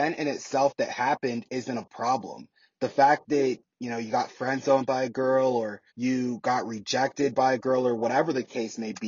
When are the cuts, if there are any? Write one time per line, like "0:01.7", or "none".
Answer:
0:05.9